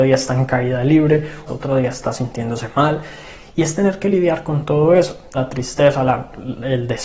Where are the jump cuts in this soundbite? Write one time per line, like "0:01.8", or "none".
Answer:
0:01.5
0:05.3